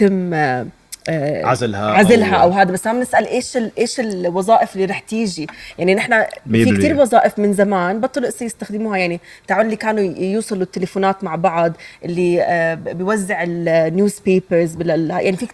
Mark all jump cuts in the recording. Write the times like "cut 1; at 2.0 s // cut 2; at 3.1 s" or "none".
none